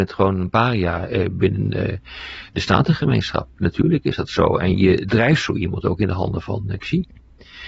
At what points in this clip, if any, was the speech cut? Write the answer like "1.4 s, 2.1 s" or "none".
none